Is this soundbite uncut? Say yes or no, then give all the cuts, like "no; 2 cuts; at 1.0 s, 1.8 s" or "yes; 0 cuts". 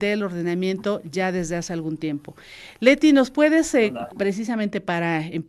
no; 1 cut; at 4.1 s